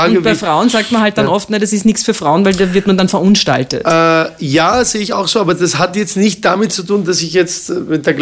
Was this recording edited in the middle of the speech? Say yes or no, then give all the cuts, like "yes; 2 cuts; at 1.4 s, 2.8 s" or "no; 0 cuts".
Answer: no; 0 cuts